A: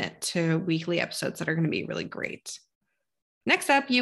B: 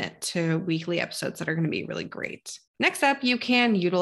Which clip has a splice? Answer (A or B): B